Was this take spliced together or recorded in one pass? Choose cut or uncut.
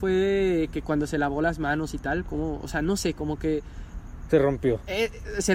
uncut